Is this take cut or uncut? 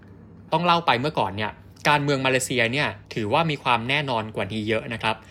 cut